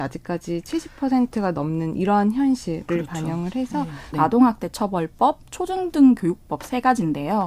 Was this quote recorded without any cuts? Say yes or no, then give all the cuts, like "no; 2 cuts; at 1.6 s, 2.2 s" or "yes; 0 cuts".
no; 1 cut; at 4.1 s